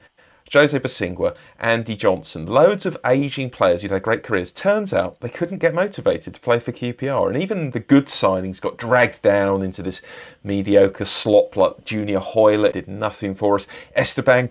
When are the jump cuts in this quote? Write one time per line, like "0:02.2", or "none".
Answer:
0:12.7